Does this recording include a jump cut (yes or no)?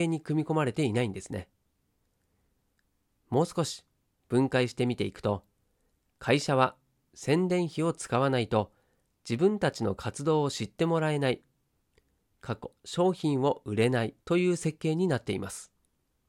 yes